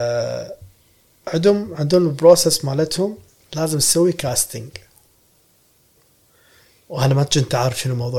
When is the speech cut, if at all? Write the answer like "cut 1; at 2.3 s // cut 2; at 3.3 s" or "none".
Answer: none